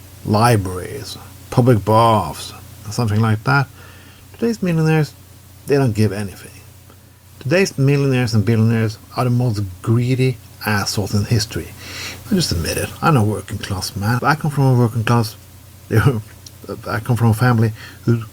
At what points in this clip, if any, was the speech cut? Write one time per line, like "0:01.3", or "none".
0:09.0
0:12.2
0:14.2